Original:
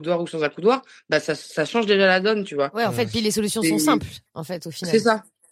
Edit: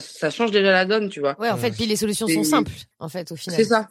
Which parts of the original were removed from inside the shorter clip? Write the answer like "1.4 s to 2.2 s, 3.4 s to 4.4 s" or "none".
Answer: none